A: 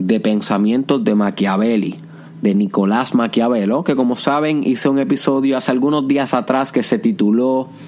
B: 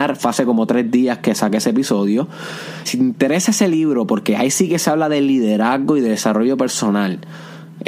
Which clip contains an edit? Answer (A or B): B